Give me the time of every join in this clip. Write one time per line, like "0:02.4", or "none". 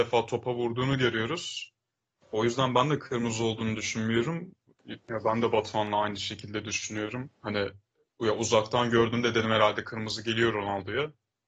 0:05.0